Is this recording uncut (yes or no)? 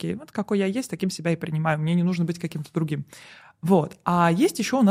yes